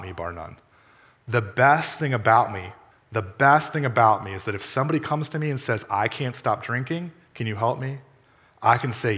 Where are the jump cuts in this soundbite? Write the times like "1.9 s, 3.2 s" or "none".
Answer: 2.9 s